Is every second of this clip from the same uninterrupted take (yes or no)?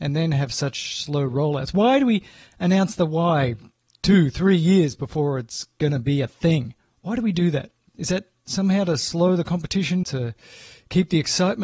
no